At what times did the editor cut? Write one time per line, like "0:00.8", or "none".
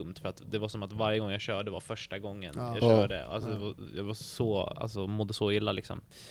none